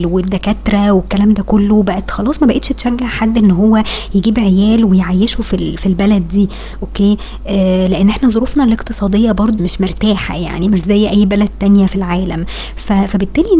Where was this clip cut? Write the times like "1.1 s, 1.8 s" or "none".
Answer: 9.6 s